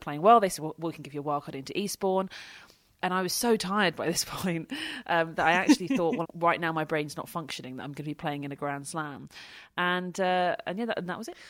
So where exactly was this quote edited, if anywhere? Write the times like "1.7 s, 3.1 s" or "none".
6.2 s